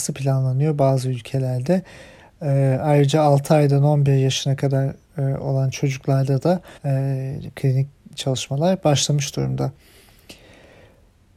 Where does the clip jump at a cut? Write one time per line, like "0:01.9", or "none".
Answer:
0:06.8